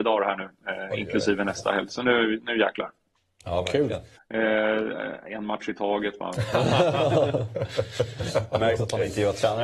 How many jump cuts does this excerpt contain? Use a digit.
1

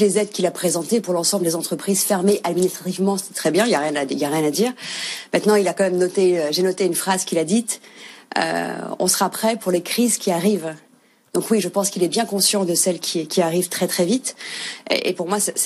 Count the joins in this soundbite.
0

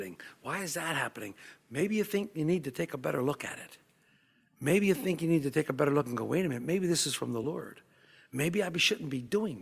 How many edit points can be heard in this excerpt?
0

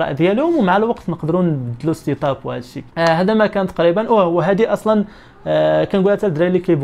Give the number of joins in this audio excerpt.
1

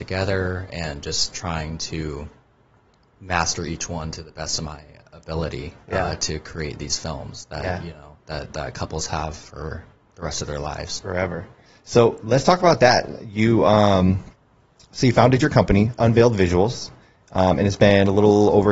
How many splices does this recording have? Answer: 0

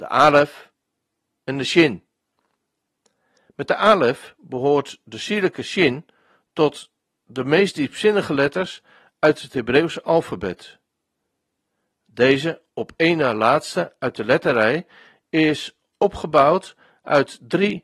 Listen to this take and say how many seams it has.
0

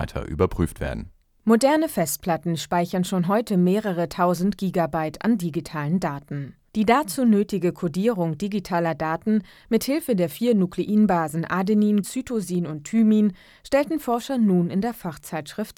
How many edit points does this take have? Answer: 2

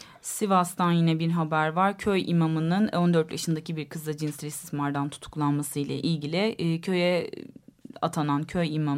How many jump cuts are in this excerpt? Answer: 0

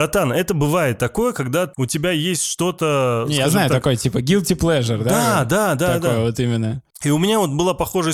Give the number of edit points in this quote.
1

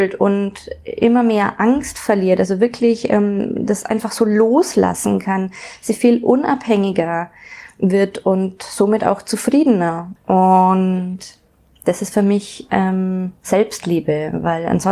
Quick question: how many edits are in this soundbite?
1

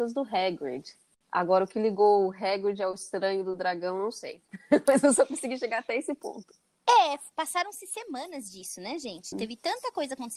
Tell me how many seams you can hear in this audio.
1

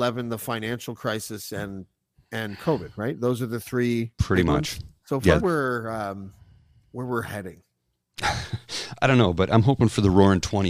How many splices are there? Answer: 1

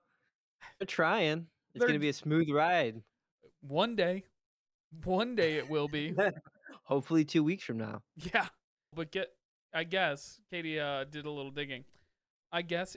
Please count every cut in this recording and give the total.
1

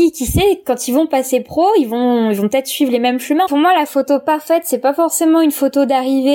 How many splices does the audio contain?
1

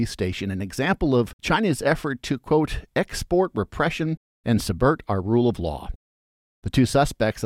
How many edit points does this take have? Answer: 0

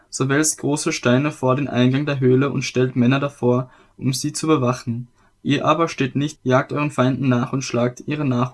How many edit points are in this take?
1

